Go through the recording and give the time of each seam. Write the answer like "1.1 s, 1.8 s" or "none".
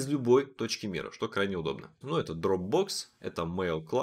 2.0 s